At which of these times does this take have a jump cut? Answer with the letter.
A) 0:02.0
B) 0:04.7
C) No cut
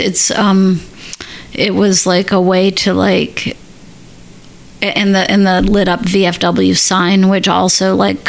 C